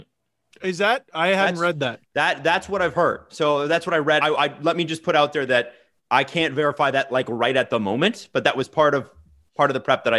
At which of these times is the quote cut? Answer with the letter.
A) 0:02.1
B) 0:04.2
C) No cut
B